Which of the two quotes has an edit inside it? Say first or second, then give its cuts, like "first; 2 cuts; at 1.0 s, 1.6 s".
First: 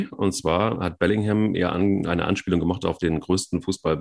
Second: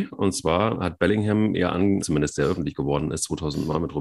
second; 1 cut; at 2.0 s